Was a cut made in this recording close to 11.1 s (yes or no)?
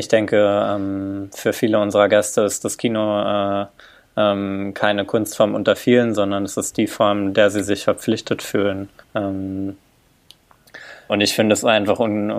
yes